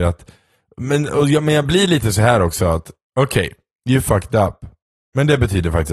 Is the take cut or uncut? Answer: uncut